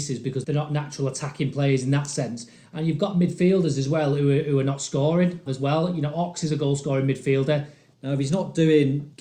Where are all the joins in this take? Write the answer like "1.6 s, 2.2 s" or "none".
5.5 s, 7.9 s